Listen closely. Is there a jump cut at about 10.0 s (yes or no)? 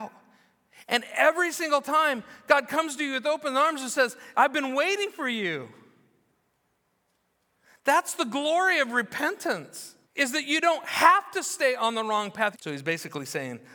yes